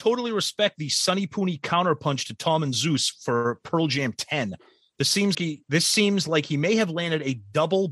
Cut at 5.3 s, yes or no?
yes